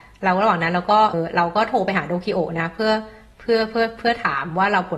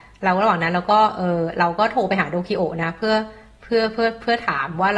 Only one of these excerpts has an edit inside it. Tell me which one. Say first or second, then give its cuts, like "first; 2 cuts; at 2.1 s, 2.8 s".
first; 1 cut; at 1.1 s